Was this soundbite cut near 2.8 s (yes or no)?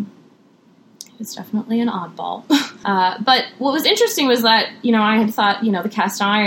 yes